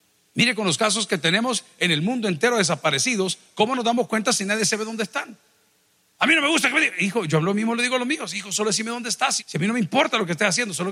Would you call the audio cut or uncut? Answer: cut